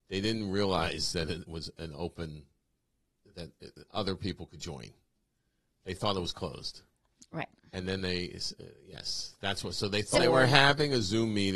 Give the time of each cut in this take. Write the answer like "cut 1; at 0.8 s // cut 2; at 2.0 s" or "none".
cut 1; at 10.1 s